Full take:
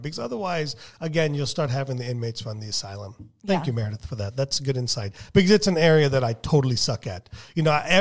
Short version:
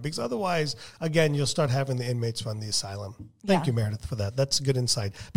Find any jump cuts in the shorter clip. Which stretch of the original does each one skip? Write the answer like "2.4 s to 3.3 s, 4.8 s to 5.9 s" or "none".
none